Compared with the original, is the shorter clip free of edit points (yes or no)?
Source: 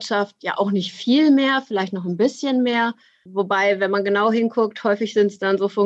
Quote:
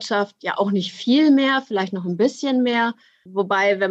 yes